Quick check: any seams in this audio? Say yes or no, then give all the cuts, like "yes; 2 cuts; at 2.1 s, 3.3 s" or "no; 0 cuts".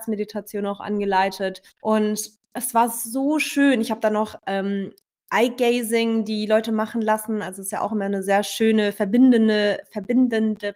yes; 1 cut; at 1.7 s